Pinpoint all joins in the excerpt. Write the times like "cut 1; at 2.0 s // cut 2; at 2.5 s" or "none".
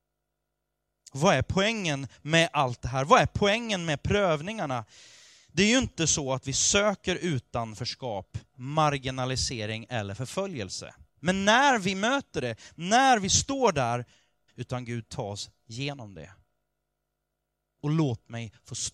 cut 1; at 11.1 s // cut 2; at 14.5 s